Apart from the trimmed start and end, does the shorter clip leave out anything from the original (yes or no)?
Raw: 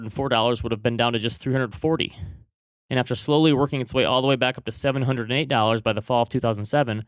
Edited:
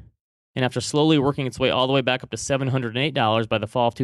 no